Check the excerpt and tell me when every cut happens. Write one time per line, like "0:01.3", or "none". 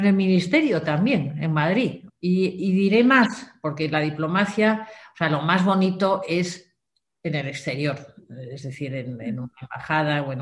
0:02.1